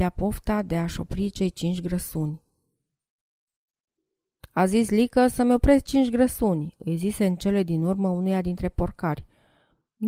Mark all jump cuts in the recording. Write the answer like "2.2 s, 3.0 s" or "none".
none